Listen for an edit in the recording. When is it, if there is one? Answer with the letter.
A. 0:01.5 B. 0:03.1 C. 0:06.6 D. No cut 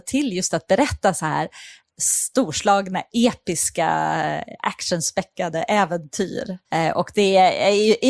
C